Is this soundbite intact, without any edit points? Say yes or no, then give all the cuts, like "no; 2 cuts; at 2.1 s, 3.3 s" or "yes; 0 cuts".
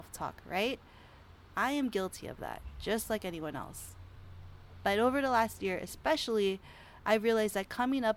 yes; 0 cuts